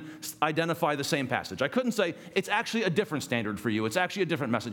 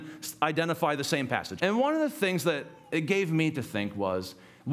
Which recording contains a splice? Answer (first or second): second